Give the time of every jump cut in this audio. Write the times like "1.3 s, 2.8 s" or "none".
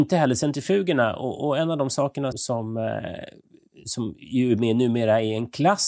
2.3 s